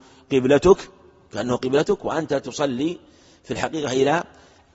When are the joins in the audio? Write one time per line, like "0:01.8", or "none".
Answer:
none